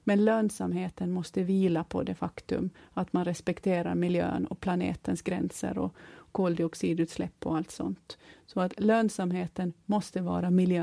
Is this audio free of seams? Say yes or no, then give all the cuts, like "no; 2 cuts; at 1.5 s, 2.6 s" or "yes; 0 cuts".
yes; 0 cuts